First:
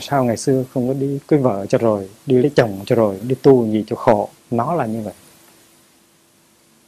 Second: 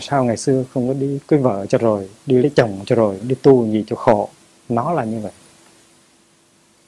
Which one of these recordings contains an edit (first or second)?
first